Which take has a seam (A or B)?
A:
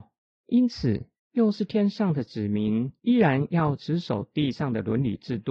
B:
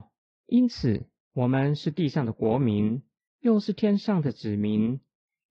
A